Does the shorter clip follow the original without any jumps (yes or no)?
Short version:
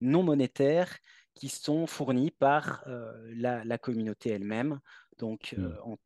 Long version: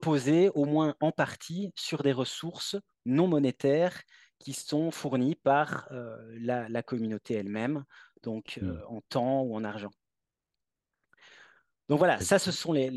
yes